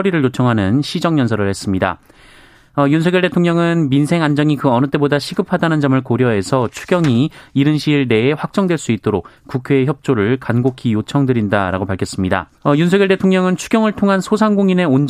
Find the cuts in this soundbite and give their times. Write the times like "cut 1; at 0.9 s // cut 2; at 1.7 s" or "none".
cut 1; at 12.6 s